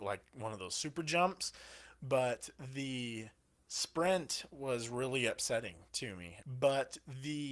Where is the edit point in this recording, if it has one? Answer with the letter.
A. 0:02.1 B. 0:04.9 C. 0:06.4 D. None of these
C